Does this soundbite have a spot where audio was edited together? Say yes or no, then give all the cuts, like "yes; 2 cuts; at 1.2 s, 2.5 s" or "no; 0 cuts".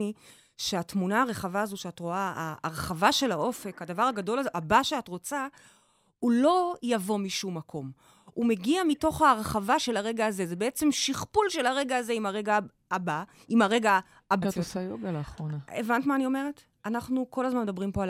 yes; 1 cut; at 14.4 s